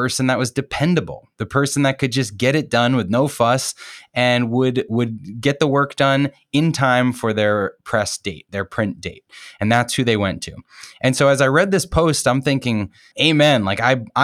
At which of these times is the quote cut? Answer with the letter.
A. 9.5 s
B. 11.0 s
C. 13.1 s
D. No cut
C